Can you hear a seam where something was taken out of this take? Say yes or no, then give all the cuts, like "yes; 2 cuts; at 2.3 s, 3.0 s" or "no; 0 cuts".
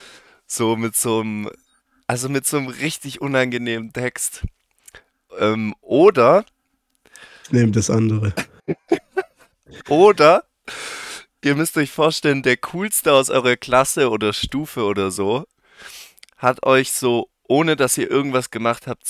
no; 0 cuts